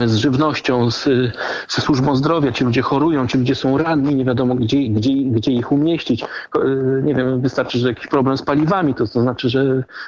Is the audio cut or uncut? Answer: cut